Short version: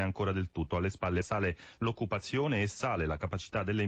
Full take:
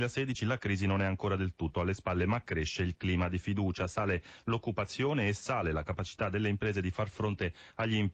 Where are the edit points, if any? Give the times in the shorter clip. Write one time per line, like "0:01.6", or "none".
0:01.2